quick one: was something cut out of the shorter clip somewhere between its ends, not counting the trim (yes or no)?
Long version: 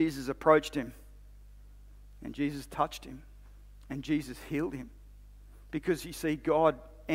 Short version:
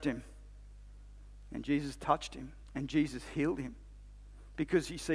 yes